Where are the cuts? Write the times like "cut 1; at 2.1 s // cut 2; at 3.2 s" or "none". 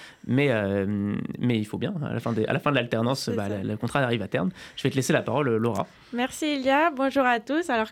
none